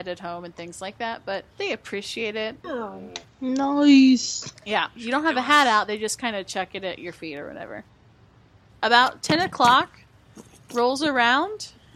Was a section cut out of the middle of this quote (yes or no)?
yes